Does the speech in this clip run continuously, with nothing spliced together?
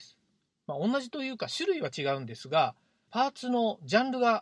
no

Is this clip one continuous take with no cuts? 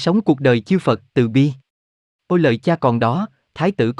no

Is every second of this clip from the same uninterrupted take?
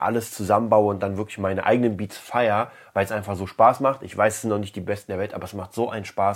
yes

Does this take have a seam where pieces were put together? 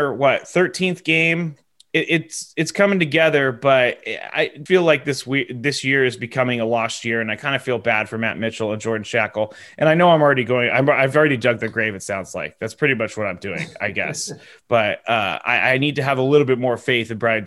yes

